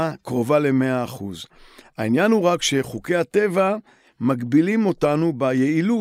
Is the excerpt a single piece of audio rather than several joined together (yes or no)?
yes